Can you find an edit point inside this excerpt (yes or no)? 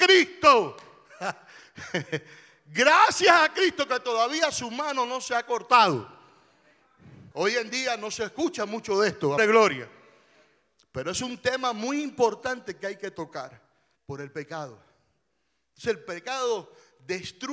yes